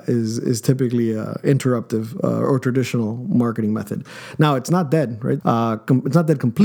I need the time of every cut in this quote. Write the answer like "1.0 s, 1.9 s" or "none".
5.4 s